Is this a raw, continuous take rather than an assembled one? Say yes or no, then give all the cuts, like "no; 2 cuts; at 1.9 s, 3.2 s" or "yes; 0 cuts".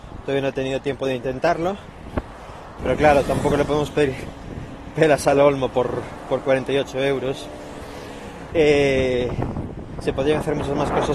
no; 3 cuts; at 2.8 s, 8.5 s, 10.0 s